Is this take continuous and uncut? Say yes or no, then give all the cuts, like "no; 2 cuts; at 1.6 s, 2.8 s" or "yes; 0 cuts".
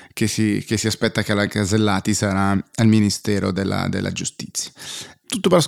yes; 0 cuts